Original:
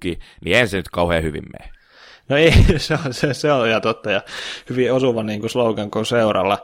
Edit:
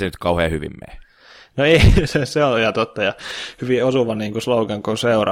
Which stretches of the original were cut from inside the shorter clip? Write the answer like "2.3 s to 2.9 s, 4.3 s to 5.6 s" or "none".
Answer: 2.8 s to 3.1 s